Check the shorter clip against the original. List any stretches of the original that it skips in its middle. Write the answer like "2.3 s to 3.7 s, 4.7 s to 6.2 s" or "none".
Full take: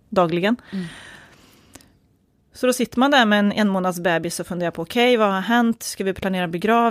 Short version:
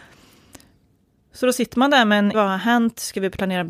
3.5 s to 5.2 s